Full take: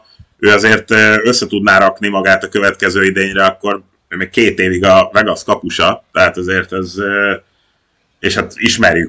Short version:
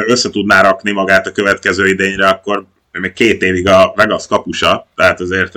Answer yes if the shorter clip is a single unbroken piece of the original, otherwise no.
yes